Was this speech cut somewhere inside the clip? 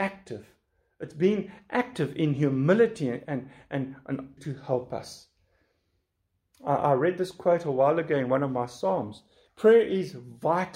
yes; 1 cut; at 4.4 s

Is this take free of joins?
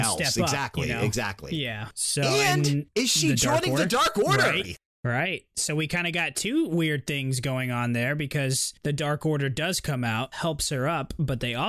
no; 1 cut; at 4.6 s

